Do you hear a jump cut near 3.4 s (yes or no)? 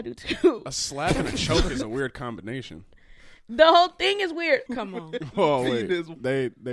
no